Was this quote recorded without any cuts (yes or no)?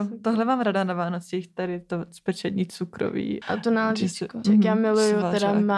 no